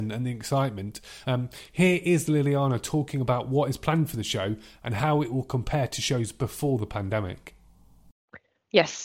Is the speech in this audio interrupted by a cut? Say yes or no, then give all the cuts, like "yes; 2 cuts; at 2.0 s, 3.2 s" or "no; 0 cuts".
yes; 1 cut; at 1.2 s